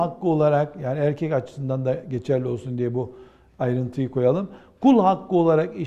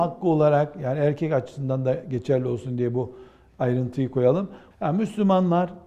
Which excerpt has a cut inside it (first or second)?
second